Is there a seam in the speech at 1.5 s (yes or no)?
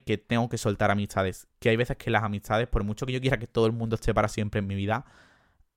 no